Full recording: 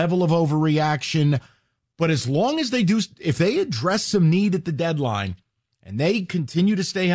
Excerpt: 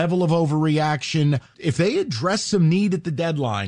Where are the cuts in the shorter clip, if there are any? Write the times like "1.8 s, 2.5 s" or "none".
1.5 s